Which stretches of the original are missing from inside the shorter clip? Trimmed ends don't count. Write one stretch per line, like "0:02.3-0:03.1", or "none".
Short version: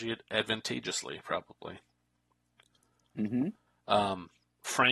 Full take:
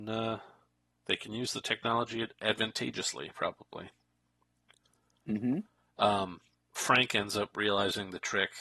none